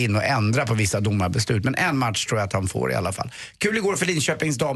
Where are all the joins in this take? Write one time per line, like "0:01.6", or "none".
none